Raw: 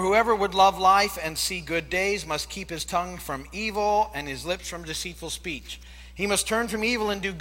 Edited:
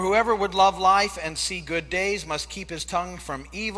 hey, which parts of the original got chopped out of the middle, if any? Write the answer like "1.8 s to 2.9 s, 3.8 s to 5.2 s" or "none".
none